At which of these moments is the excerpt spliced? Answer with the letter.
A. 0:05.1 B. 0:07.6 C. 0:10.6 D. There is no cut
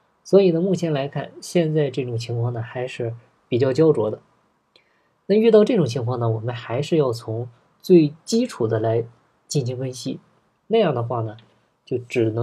C